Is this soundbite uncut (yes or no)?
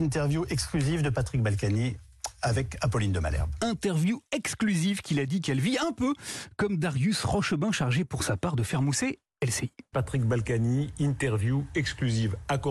yes